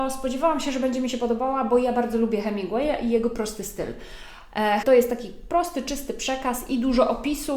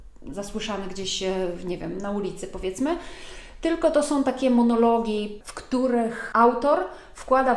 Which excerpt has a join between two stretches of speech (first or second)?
first